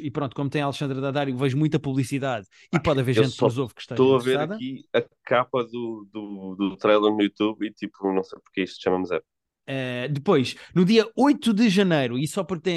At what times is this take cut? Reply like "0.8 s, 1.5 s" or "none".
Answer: 9.6 s